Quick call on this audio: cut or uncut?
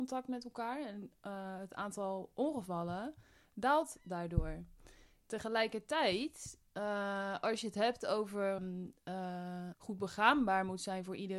cut